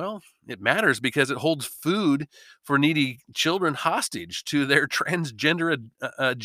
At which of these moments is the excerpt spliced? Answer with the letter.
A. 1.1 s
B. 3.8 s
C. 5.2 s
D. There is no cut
D